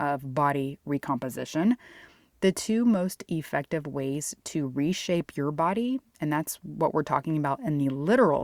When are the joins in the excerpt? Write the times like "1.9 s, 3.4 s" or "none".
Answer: none